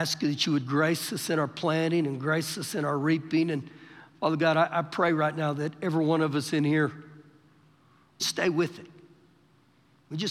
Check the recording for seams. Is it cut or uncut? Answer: cut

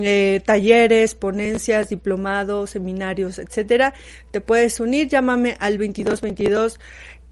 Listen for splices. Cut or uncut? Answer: uncut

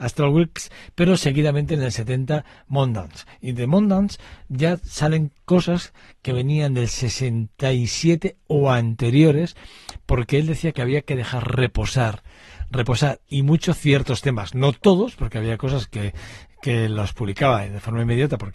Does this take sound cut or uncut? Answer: uncut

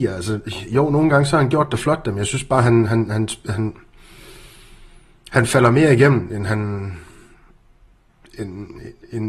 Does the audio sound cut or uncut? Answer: uncut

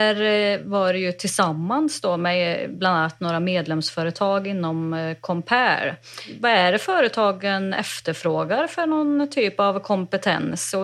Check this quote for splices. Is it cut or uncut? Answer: uncut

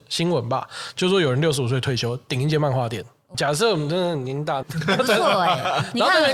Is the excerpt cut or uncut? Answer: cut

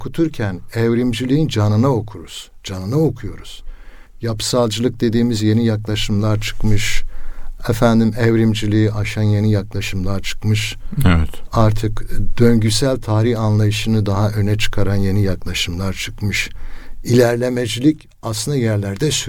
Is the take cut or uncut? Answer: uncut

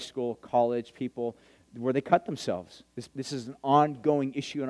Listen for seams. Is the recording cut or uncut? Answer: cut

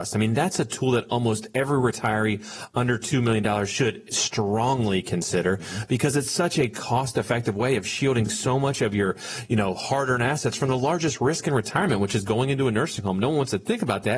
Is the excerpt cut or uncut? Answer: uncut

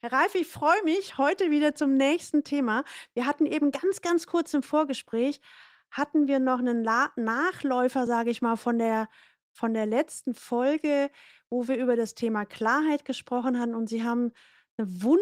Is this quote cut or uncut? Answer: uncut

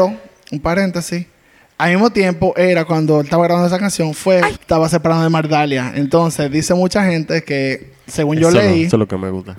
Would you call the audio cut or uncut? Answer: cut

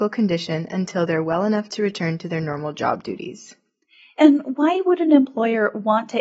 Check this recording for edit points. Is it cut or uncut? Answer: uncut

